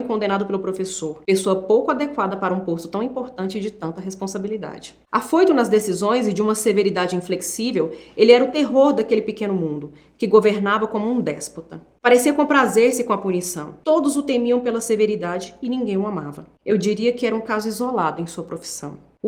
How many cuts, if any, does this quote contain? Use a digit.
1